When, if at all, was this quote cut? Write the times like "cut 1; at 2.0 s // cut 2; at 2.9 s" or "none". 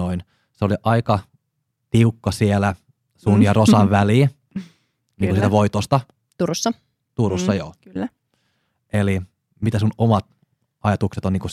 none